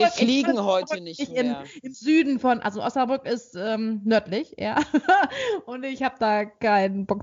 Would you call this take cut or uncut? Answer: uncut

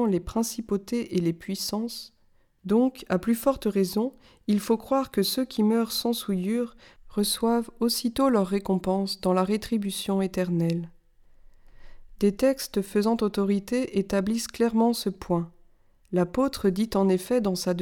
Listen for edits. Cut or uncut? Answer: cut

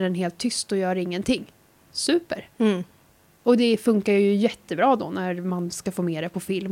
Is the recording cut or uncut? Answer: cut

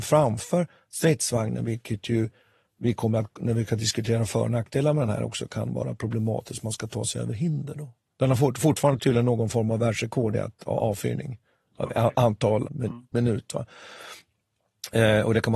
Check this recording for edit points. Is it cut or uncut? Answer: cut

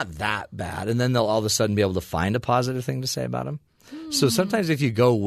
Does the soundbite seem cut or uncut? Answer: uncut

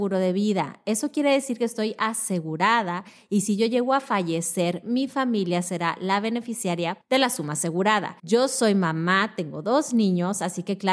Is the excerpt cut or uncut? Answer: cut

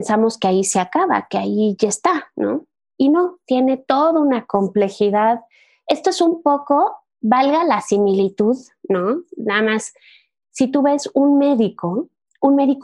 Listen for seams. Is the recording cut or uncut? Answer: uncut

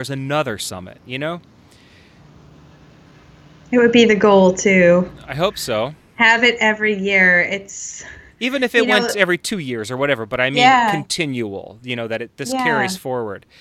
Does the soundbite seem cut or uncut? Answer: uncut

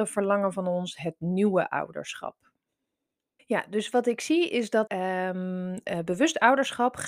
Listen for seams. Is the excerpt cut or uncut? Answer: cut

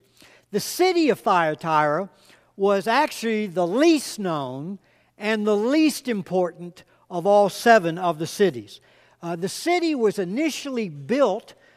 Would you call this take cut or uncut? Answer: uncut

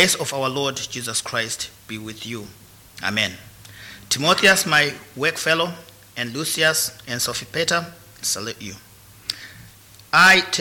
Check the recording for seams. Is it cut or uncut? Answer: cut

